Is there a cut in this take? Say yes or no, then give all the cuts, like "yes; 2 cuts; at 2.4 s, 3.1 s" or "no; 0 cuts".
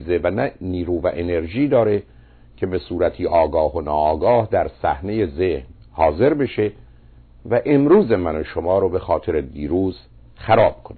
no; 0 cuts